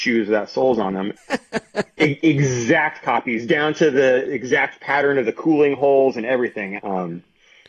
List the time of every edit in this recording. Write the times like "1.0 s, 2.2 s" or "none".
1.2 s, 2.2 s, 6.8 s